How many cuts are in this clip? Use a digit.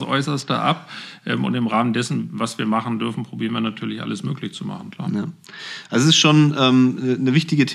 0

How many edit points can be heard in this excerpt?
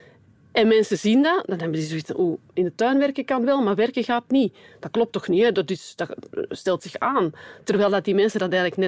0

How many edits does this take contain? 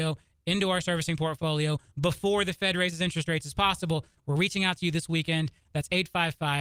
2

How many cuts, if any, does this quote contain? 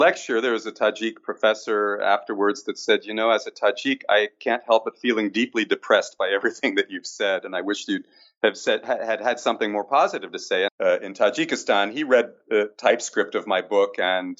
1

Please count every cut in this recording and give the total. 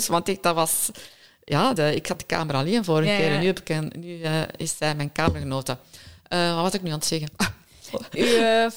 1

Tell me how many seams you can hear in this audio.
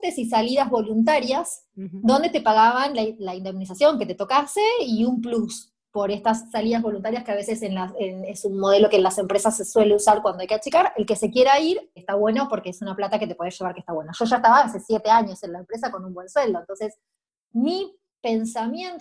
1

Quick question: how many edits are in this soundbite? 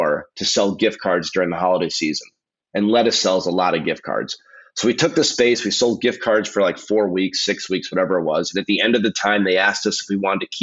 0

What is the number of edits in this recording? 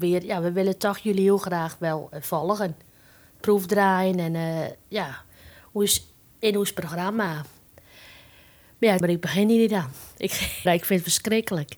2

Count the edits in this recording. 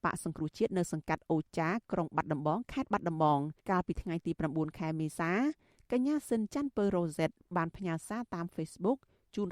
1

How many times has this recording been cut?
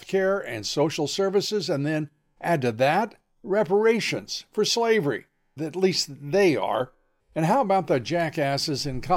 2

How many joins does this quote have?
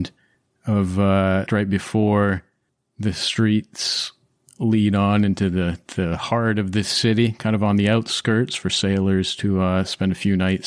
1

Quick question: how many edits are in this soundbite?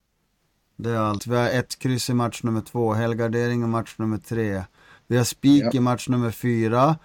1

